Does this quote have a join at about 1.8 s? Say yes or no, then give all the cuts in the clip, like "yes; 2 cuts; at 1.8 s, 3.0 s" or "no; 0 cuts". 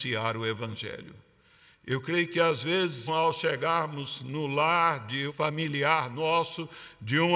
no; 2 cuts; at 3.1 s, 5.3 s